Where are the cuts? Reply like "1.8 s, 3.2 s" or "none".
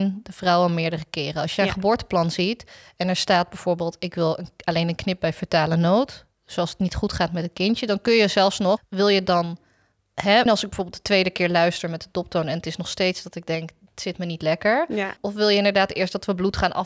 8.8 s, 10.5 s, 15.2 s